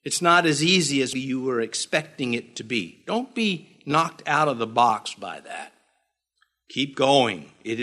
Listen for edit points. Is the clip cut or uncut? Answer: cut